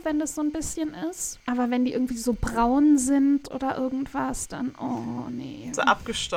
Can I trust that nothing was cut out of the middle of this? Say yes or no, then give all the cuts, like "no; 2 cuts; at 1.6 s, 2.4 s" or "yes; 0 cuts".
yes; 0 cuts